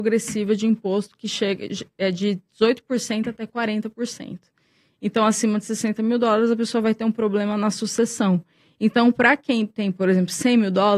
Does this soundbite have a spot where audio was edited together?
no; 0 cuts

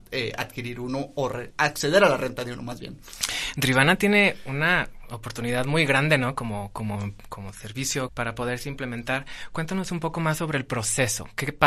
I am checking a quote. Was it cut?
yes; 2 cuts; at 1.5 s, 8.1 s

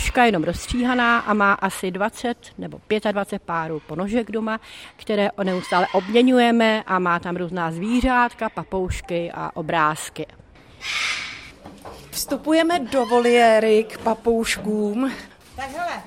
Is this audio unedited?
yes; 0 cuts

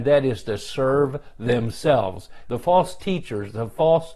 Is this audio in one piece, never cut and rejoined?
no; 1 cut; at 2.4 s

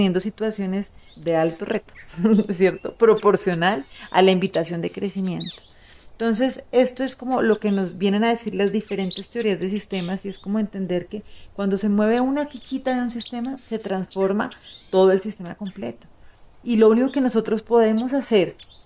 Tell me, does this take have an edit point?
yes; 1 cut; at 1.1 s

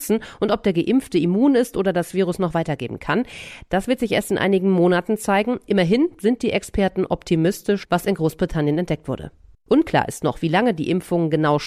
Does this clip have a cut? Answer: yes; 2 cuts; at 7.9 s, 9.7 s

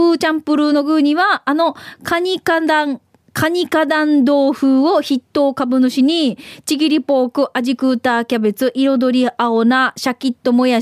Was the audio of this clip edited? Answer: no; 0 cuts

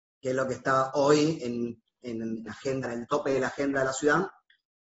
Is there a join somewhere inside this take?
yes; 1 cut; at 2.5 s

